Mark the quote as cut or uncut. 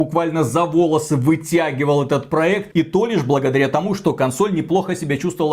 cut